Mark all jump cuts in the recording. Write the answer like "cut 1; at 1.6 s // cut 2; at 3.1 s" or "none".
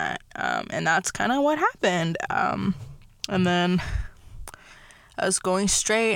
cut 1; at 2.3 s